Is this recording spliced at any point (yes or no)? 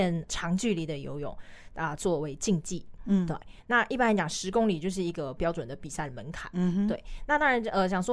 no